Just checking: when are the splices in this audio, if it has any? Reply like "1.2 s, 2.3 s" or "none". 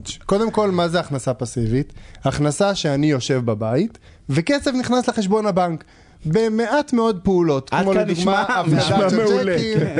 none